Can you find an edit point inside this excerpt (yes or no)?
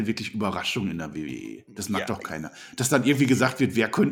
no